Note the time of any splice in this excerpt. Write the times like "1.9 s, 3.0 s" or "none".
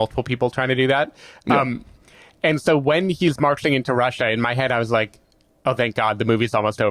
none